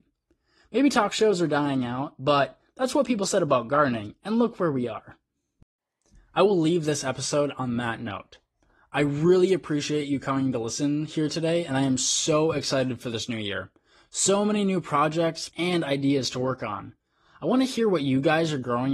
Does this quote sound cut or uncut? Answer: cut